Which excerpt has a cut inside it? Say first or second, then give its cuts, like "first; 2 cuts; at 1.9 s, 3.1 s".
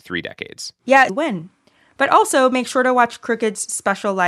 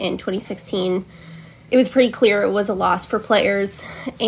first; 1 cut; at 1.1 s